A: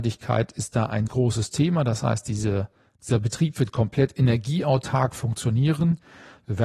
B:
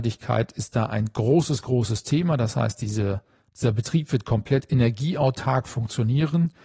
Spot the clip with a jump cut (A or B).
A